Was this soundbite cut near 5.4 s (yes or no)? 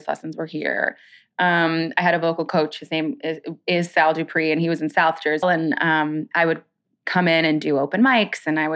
yes